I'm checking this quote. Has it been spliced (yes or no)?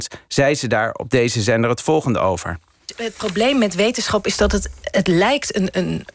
no